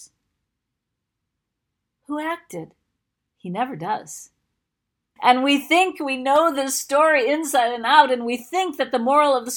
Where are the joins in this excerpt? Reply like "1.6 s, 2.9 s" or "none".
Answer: 3.2 s, 5.2 s